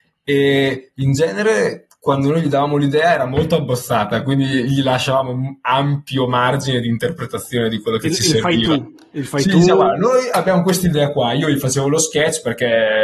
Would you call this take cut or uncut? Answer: uncut